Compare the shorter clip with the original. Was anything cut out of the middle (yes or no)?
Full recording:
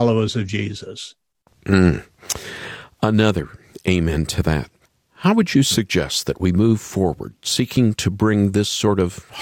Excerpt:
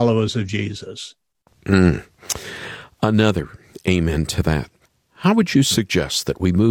no